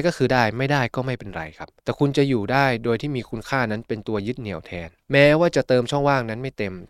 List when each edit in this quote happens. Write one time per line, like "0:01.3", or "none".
0:01.8
0:05.0